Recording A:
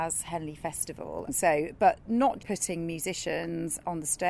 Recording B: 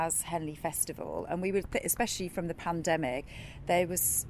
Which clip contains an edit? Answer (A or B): A